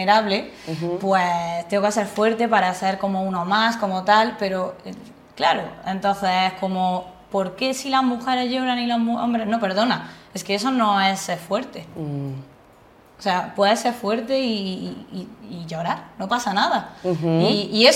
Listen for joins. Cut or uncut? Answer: uncut